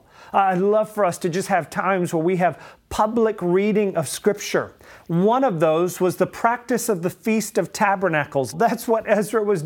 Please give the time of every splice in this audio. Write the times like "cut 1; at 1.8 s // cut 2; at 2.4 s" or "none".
cut 1; at 5.0 s // cut 2; at 8.5 s